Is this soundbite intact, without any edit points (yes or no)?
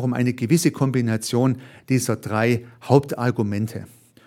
yes